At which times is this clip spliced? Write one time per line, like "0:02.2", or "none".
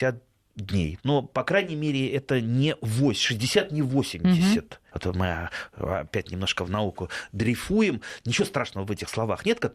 0:01.0
0:04.9